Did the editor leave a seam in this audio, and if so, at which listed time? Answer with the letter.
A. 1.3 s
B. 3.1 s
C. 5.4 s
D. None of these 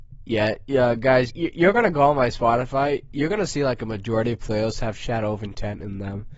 A